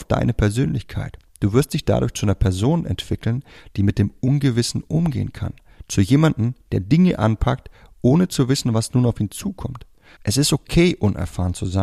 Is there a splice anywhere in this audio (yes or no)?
yes